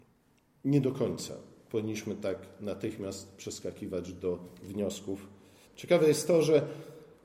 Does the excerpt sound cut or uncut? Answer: cut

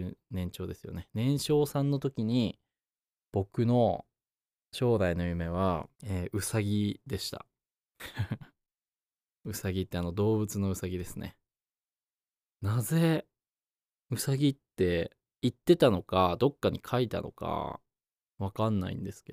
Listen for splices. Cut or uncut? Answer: cut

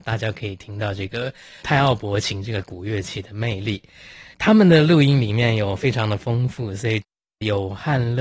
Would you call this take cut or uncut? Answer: uncut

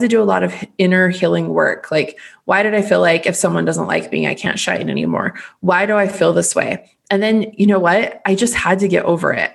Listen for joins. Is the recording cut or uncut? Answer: uncut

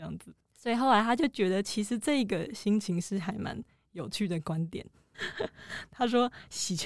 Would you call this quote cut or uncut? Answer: cut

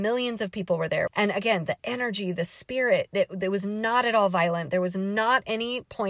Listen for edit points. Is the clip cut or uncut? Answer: cut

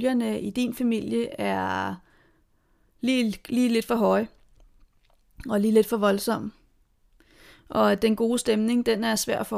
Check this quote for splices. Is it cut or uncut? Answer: uncut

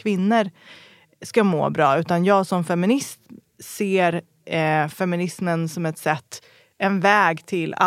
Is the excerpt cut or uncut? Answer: uncut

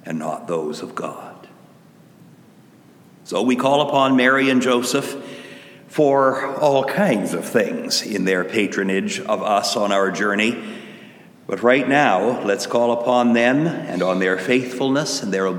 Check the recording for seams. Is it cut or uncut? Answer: uncut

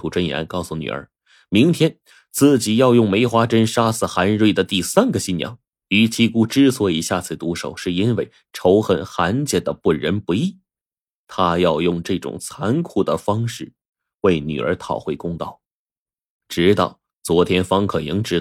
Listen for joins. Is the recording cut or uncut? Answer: cut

